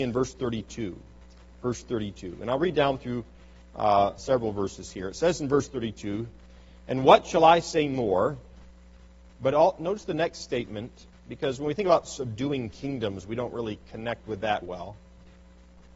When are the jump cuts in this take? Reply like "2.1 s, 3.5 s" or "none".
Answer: 4.2 s, 9.3 s, 14.6 s